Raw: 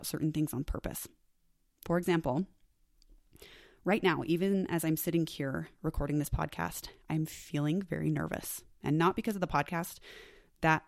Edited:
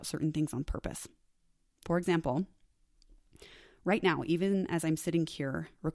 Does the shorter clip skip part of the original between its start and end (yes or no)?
no